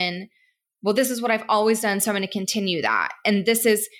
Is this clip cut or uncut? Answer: uncut